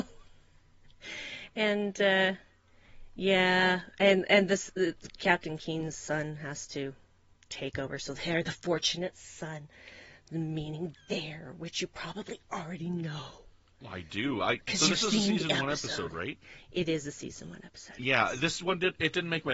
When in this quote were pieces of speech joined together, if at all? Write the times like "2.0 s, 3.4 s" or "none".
none